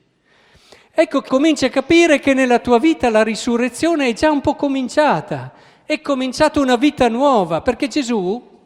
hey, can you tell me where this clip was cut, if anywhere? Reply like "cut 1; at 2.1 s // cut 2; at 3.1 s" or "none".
cut 1; at 1.3 s